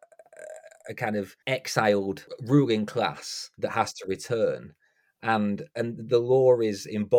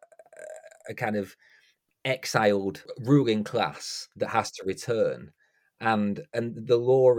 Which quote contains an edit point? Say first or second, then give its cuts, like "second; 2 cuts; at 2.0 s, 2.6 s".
first; 1 cut; at 1.4 s